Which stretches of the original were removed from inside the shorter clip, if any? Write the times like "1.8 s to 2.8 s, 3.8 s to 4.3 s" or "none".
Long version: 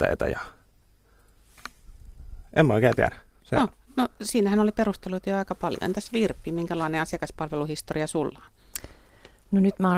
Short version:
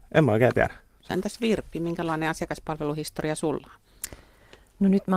3.5 s to 5.8 s